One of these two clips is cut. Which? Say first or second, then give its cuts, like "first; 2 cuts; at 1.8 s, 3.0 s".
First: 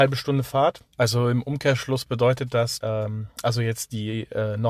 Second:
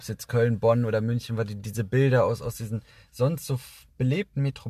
first; 2 cuts; at 0.9 s, 2.8 s